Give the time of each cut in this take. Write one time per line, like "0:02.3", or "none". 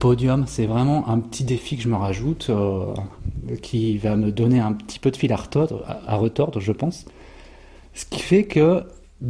none